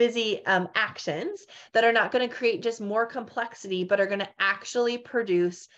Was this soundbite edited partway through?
no; 0 cuts

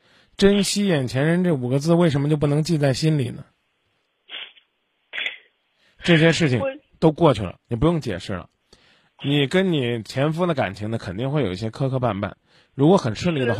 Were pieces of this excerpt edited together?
no; 0 cuts

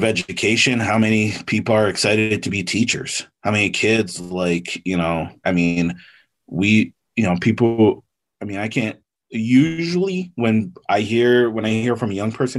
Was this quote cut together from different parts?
yes; 1 cut; at 5.4 s

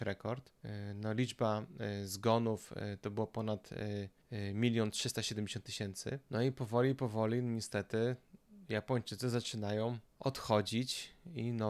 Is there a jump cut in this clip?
no; 0 cuts

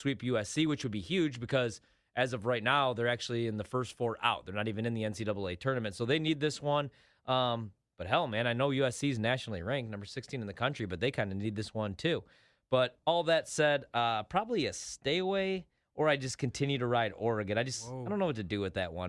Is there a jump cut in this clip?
no; 0 cuts

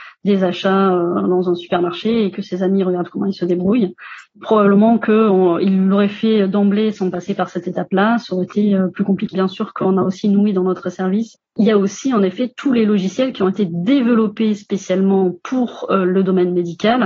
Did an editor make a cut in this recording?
yes; 1 cut; at 9.3 s

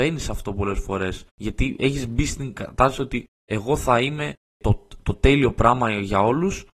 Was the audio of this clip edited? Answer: yes; 1 cut; at 1.3 s

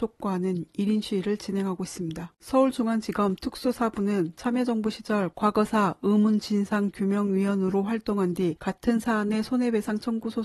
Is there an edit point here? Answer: yes; 1 cut; at 2.3 s

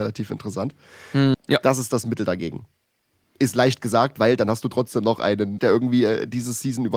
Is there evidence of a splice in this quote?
yes; 2 cuts; at 1.3 s, 5.6 s

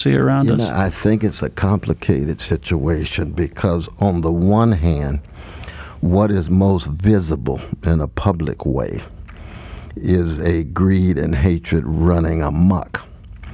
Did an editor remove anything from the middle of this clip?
no; 0 cuts

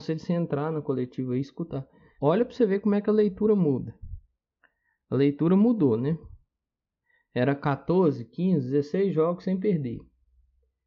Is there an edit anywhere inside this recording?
yes; 1 cut; at 2.2 s

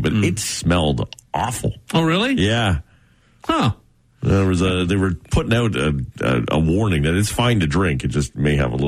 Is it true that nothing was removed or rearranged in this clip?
yes; 0 cuts

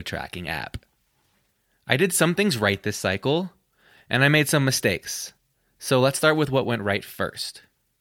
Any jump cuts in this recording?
no; 0 cuts

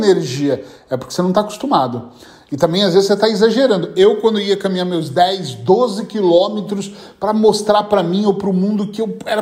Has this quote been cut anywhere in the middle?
no; 0 cuts

